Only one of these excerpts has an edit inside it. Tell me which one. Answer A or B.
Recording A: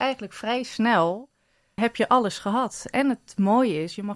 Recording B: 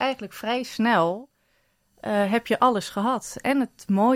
A